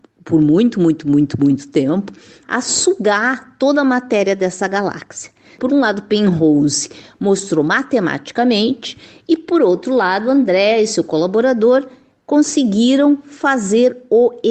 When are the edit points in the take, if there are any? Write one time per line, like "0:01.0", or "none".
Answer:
none